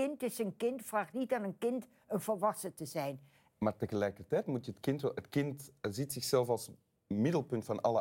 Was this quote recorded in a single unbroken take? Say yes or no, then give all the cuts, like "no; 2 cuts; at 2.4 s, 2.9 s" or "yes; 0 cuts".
no; 1 cut; at 3.5 s